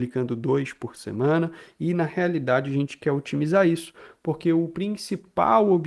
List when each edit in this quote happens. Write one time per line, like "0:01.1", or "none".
none